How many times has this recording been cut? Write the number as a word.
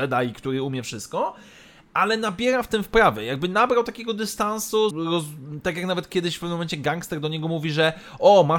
one